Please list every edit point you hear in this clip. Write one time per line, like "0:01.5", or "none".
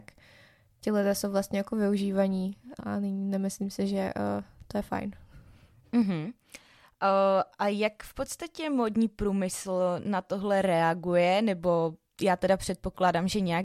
0:02.8